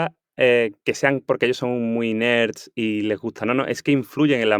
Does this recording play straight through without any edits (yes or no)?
yes